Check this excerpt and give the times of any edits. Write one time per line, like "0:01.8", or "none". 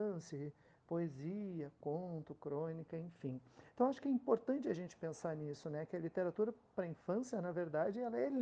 none